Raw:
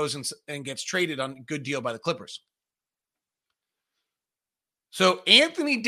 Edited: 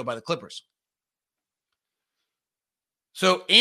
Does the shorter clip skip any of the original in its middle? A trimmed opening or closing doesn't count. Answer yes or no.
no